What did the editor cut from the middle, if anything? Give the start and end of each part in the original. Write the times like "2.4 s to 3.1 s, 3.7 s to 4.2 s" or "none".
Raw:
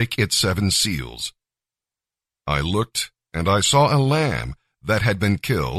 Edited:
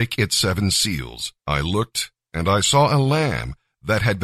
1.4 s to 2.4 s